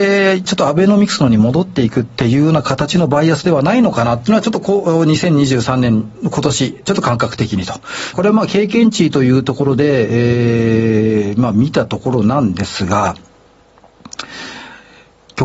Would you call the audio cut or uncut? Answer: cut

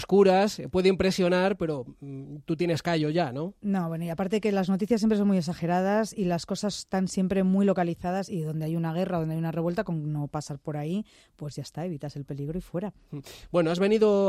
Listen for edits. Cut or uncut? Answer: uncut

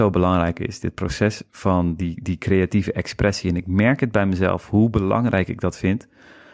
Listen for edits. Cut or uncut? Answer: uncut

